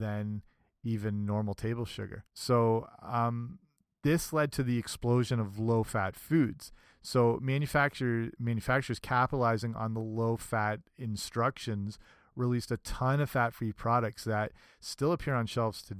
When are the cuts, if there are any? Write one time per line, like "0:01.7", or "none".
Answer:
0:02.3